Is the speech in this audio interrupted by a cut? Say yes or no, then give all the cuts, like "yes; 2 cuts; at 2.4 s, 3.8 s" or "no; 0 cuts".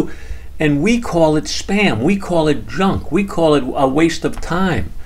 no; 0 cuts